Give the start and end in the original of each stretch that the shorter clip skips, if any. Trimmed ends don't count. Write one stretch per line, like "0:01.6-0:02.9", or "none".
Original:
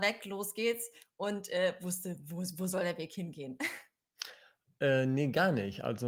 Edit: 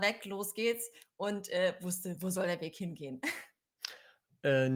0:02.2-0:02.6

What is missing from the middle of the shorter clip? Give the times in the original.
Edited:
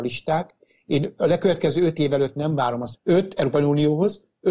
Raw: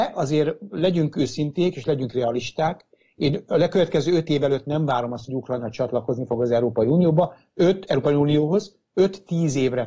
0:05.3-0:07.5

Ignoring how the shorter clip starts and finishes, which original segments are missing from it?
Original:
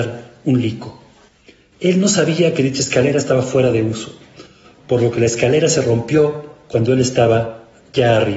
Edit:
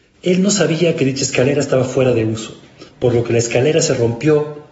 0:04.5-0:04.8

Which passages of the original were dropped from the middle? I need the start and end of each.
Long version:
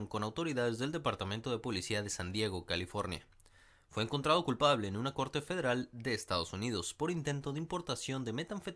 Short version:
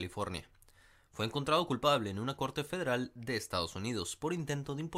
none

